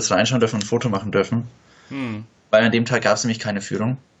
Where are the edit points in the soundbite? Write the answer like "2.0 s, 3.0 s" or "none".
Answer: none